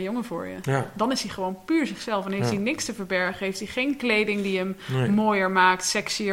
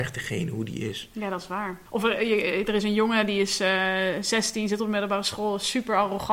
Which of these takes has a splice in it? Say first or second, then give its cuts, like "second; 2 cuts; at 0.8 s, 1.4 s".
second; 1 cut; at 1.8 s